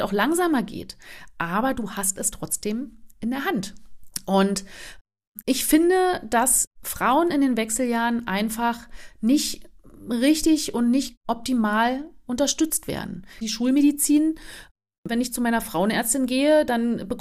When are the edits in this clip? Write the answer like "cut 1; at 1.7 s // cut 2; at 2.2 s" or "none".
cut 1; at 13.4 s